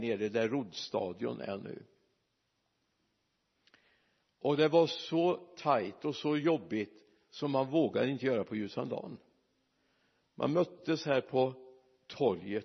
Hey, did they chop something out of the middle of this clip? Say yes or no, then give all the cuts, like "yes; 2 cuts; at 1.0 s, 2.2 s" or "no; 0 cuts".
no; 0 cuts